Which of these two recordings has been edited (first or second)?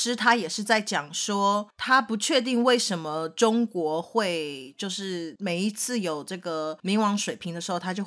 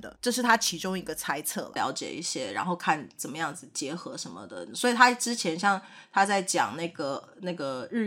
second